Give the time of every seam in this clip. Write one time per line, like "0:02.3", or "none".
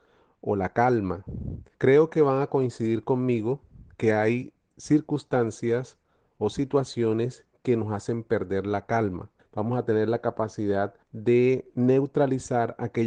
0:01.7
0:09.4
0:11.0